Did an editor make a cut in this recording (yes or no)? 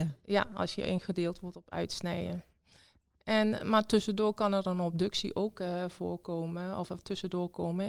yes